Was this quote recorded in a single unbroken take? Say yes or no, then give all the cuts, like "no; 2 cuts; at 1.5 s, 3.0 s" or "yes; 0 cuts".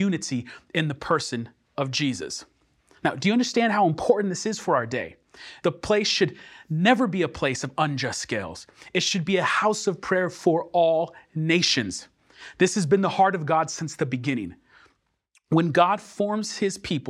no; 1 cut; at 5.6 s